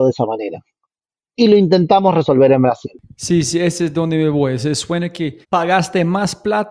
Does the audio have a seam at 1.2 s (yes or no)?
no